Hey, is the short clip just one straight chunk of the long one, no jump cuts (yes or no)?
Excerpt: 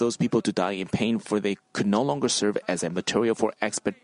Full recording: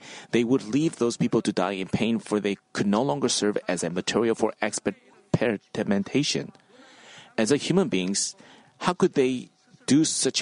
yes